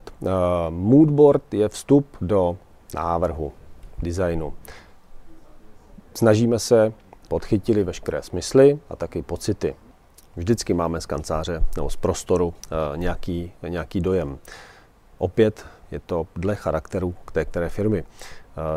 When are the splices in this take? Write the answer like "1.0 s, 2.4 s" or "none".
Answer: 7.3 s